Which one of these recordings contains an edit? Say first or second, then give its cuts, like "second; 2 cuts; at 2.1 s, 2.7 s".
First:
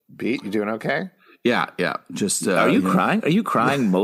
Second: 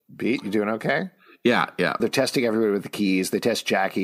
second; 1 cut; at 2.0 s